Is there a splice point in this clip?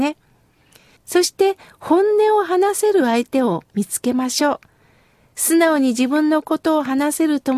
yes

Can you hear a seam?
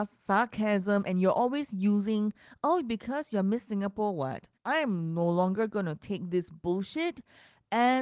yes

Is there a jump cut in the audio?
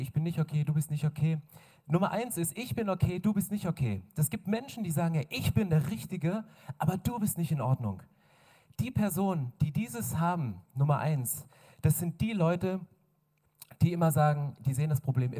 no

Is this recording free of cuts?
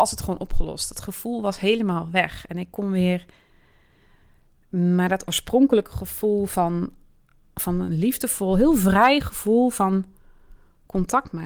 yes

